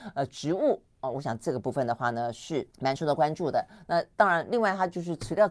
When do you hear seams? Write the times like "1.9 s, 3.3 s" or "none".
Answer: 2.7 s